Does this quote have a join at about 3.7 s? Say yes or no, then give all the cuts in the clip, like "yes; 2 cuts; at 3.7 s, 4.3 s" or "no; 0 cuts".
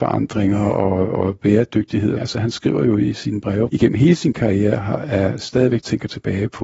yes; 2 cuts; at 2.2 s, 3.7 s